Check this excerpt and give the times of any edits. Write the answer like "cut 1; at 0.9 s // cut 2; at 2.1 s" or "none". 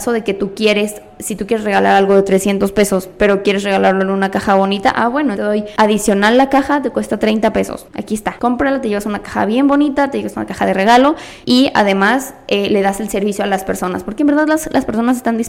cut 1; at 5.3 s